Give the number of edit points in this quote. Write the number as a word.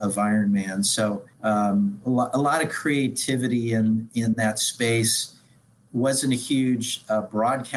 one